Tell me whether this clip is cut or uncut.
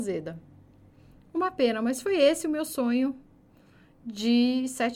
uncut